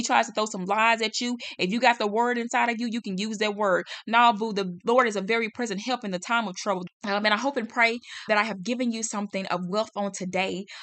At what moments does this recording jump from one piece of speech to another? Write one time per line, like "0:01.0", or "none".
0:06.9
0:08.3